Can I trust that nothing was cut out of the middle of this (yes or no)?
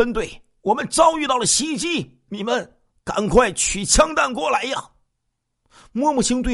no